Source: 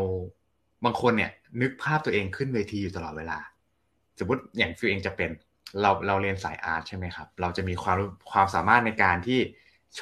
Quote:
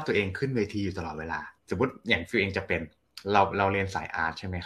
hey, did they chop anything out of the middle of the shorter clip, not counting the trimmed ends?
yes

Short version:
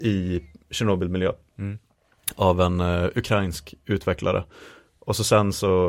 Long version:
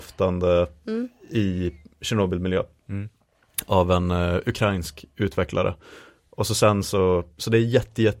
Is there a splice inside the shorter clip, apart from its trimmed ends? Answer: no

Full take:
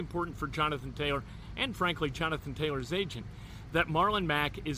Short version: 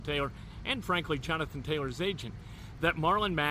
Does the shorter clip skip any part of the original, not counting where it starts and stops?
no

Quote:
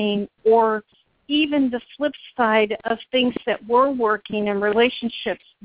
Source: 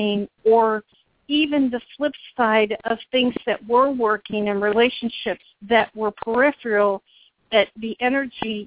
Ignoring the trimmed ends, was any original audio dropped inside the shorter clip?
no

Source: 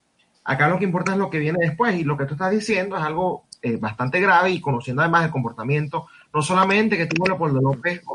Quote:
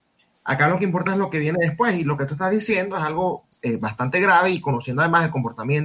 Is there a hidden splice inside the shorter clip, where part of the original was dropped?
no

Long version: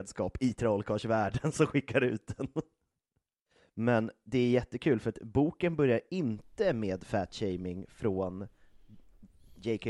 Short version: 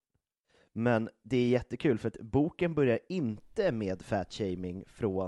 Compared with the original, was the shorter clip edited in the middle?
no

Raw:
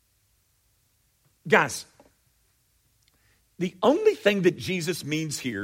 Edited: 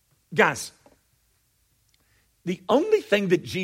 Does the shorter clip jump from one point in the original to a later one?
no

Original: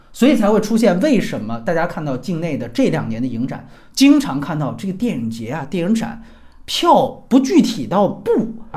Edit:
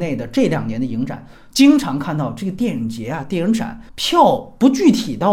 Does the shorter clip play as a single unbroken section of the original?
no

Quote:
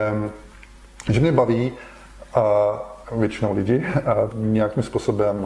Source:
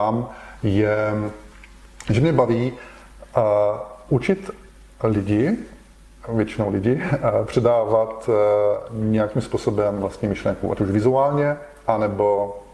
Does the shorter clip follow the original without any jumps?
no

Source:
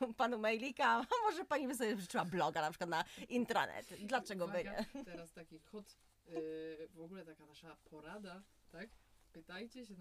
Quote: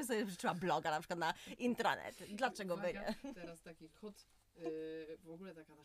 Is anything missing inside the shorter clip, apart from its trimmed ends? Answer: no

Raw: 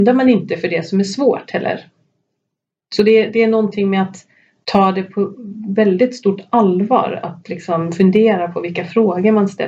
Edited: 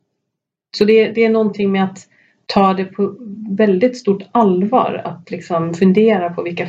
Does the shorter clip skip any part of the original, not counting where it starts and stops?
no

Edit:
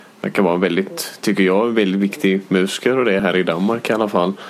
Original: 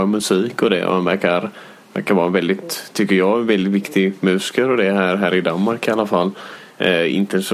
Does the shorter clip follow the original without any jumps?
no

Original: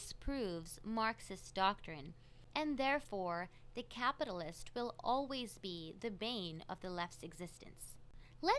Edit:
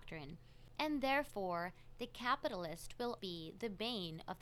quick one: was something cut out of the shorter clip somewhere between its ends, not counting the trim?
yes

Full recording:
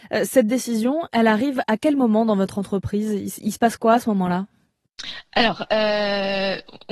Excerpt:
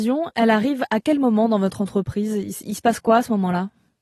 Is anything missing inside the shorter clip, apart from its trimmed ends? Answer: no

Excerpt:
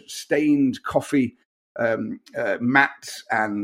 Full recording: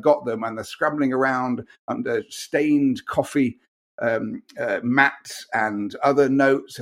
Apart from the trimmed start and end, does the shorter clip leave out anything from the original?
no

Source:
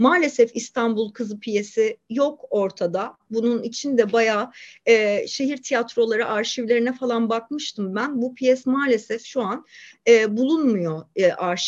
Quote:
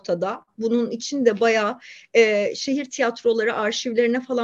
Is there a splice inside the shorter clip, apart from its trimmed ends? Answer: no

